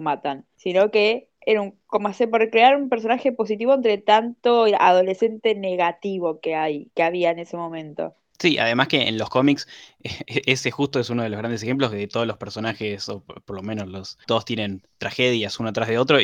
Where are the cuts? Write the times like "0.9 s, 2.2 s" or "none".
14.3 s